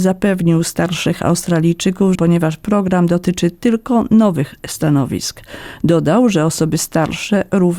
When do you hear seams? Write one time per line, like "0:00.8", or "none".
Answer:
0:02.1